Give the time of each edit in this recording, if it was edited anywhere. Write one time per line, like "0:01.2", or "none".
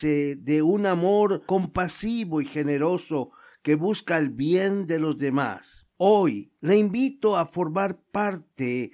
0:05.9